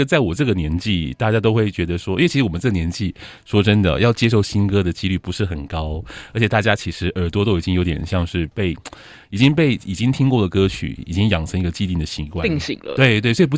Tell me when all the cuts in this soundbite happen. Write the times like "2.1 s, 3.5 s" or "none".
none